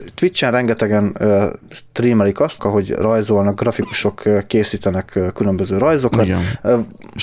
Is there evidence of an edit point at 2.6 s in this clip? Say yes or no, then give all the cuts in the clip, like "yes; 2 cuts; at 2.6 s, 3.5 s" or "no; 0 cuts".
yes; 1 cut; at 2.6 s